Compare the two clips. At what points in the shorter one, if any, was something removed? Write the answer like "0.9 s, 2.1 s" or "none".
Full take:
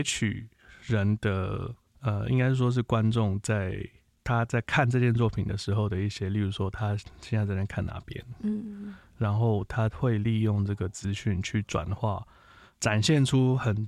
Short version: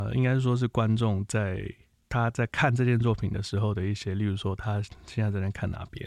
none